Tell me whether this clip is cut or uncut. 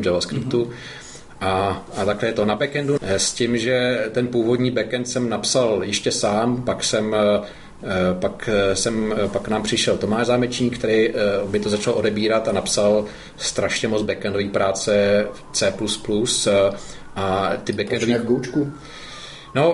cut